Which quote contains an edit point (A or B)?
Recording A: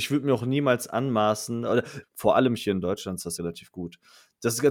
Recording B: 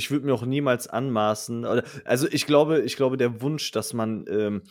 A